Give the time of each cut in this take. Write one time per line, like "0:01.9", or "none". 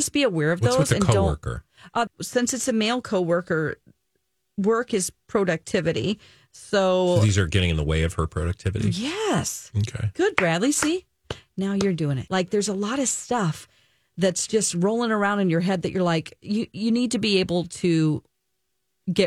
0:02.1
0:12.3